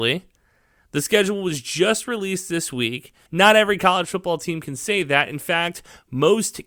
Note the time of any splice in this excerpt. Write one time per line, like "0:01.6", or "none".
0:03.3